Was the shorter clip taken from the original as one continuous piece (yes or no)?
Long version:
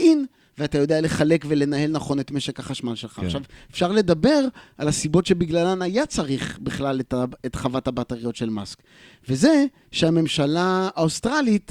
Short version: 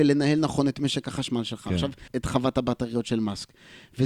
no